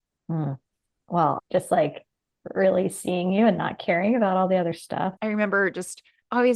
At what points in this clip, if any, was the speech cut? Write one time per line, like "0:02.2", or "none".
0:01.4
0:05.2